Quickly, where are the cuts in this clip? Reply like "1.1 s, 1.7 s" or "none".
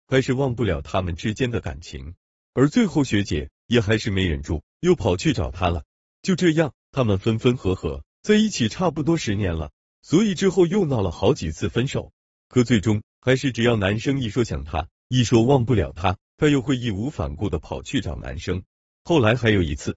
9.9 s